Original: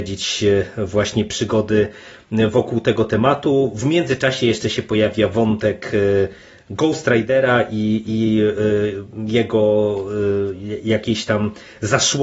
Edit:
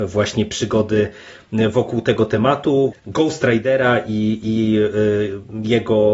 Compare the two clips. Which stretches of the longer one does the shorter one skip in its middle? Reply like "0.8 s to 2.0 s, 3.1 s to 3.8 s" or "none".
3.7 s to 6.6 s